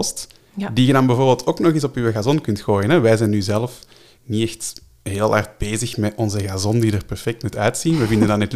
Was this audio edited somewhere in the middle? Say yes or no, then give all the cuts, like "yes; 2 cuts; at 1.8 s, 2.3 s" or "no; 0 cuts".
no; 0 cuts